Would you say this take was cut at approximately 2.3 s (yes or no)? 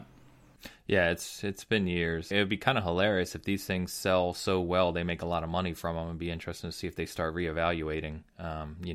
yes